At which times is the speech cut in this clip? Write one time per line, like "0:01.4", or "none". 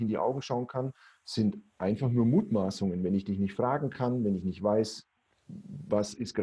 none